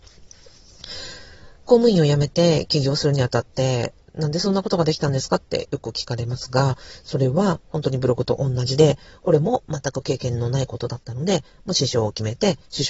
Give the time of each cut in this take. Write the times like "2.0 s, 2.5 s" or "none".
none